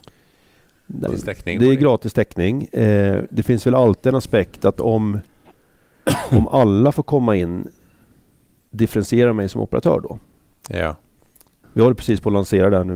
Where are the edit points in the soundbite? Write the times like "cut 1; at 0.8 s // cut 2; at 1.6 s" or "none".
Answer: cut 1; at 1.1 s // cut 2; at 11.6 s